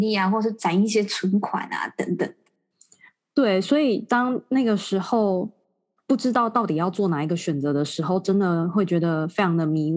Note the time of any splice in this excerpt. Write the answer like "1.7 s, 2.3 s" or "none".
none

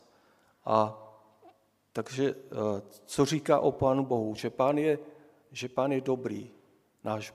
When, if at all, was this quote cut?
none

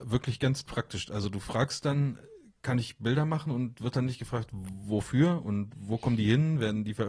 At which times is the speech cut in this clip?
none

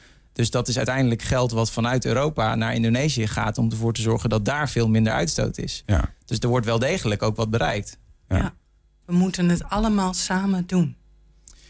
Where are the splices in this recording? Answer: 9.0 s

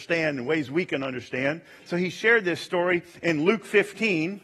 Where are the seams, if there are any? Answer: none

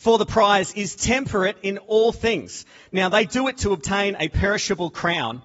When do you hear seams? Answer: none

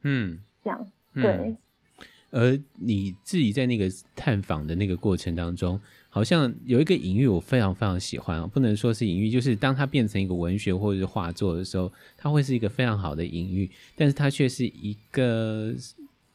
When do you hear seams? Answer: none

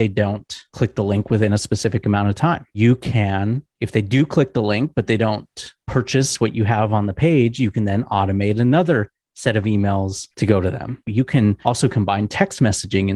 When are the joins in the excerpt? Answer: 11.1 s

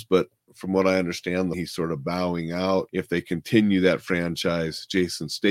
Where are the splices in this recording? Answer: 1.5 s

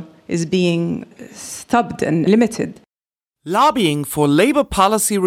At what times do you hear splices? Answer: none

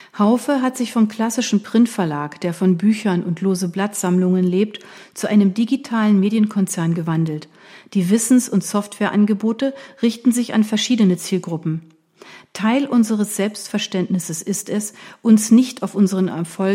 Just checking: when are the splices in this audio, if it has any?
none

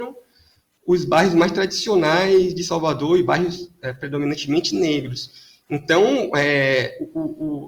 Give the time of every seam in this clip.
none

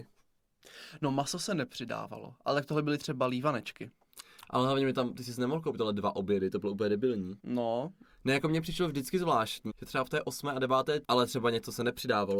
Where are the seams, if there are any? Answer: 7.4 s, 9.7 s, 11.0 s

